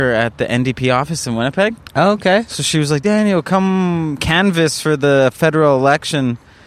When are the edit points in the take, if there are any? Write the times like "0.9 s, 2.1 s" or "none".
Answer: none